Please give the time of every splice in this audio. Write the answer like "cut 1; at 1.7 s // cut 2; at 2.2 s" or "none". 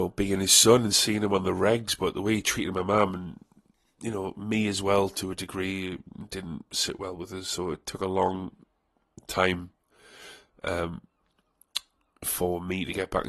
none